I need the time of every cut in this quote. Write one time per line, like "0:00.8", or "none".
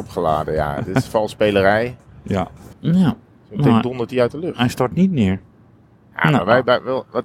0:02.7